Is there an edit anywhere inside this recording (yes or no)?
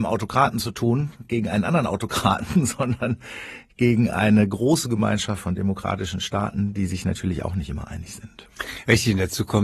no